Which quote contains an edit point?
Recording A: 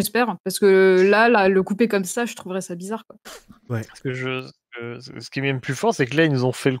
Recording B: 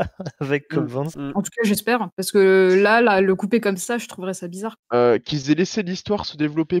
B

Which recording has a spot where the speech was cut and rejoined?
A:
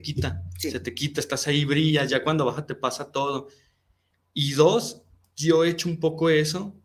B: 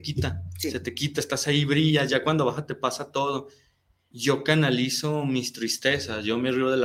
B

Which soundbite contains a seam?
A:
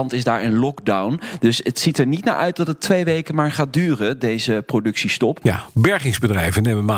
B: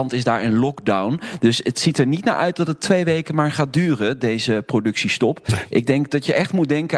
A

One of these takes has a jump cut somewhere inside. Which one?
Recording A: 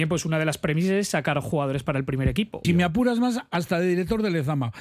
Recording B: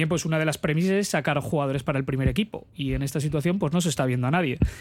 A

